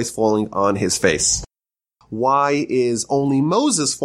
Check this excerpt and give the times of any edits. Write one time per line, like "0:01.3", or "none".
0:02.0